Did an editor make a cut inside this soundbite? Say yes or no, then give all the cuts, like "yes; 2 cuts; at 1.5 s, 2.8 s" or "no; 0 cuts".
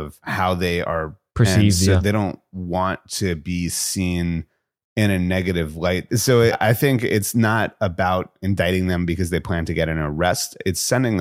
yes; 2 cuts; at 1.3 s, 6.1 s